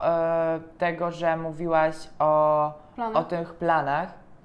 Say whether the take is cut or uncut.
uncut